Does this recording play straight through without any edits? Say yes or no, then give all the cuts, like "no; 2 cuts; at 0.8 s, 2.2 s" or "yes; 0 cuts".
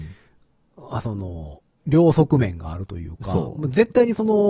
yes; 0 cuts